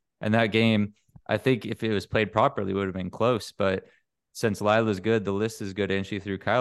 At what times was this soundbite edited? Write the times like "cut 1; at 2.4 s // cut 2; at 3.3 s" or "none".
none